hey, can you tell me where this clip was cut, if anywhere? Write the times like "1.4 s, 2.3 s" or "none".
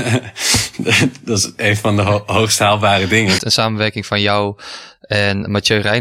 3.4 s